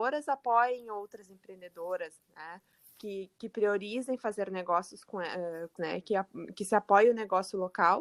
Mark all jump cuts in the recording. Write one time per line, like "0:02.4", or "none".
0:05.8

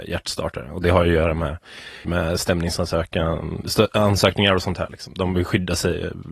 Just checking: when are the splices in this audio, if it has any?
0:02.0

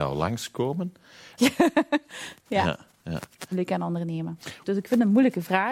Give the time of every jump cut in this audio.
0:01.4
0:03.5
0:04.6

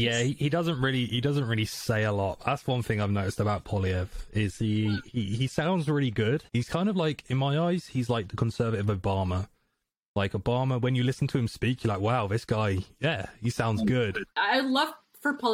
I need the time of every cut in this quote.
0:06.5
0:14.3

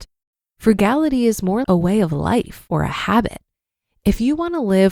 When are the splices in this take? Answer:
0:01.6

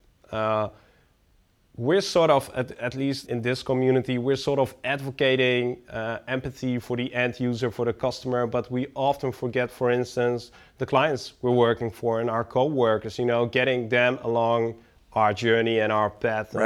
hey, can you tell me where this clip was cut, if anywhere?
0:03.3

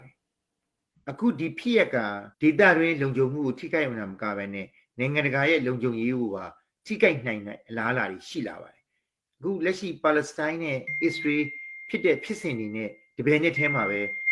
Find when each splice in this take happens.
0:02.3

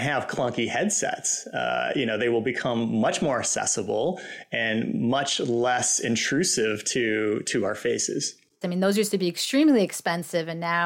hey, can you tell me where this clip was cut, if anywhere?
0:08.6

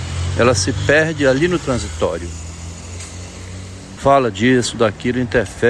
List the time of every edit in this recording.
0:04.0

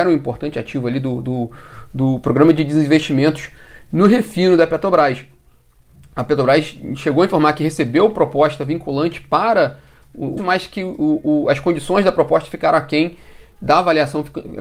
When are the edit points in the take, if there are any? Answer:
0:10.4

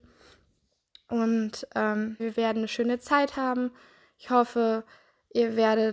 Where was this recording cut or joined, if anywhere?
0:02.2

